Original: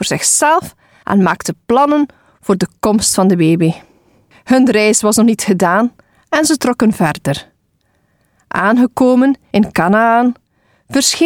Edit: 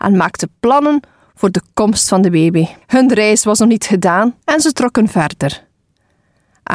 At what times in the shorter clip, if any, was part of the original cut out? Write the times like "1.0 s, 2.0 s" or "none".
2.8 s, 4.4 s

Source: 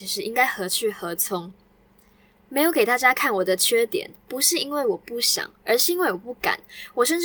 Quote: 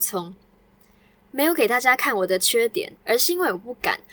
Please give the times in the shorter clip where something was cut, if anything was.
3.0 s

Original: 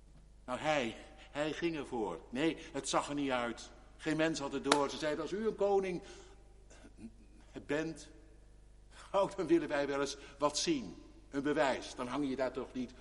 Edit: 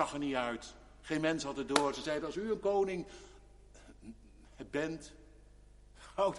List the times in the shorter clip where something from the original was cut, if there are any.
none

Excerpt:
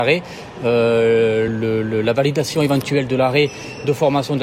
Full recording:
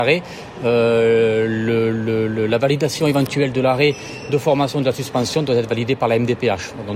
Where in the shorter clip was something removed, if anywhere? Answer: 1.5 s

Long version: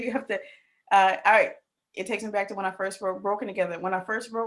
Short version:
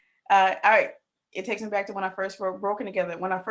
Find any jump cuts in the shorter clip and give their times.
none

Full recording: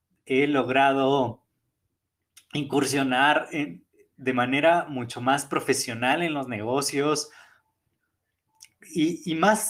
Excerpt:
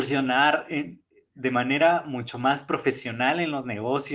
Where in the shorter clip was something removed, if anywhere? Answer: none

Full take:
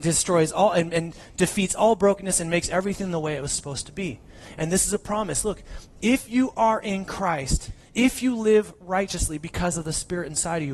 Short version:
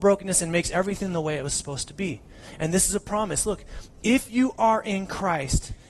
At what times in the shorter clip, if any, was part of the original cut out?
none

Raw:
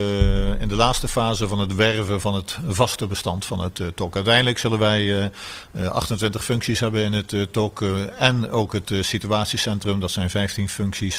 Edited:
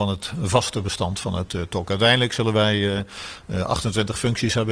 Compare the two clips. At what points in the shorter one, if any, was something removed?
none

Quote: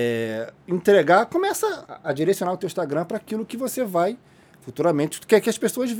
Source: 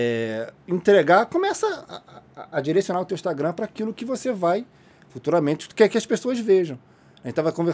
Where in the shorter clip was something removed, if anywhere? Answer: 1.9 s

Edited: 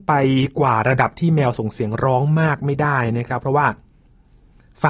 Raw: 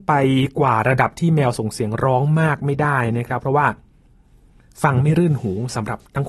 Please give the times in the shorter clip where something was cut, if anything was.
none

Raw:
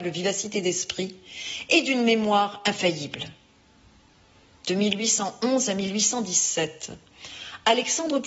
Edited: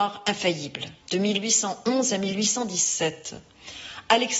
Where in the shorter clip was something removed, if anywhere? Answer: 1.0 s

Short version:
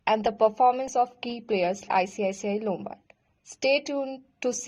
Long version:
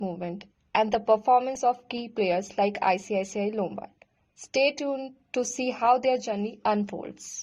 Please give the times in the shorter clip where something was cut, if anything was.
1.9 s

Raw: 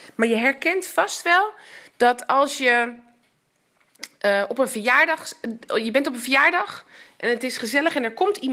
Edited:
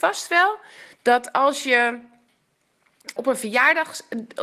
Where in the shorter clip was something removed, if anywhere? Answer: 3.2 s

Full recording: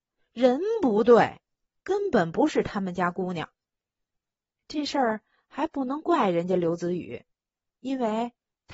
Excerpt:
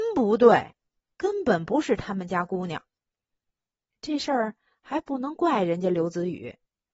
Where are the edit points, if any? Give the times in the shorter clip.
none

